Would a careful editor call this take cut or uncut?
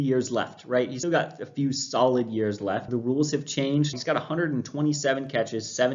cut